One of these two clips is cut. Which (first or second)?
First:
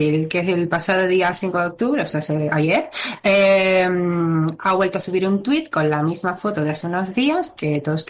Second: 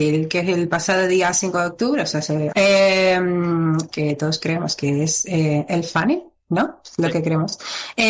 second